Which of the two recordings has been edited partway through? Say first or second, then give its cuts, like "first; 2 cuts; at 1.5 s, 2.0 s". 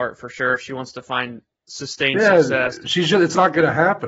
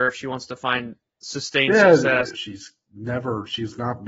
second; 1 cut; at 2.3 s